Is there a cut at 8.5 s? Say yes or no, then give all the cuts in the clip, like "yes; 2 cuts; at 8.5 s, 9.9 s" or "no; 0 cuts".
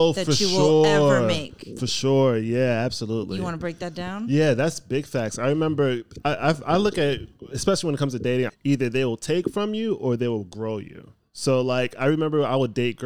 yes; 1 cut; at 8.5 s